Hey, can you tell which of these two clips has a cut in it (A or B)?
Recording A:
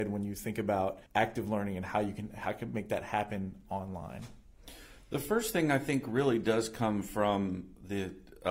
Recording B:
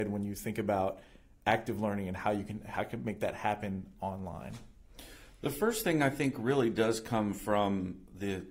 A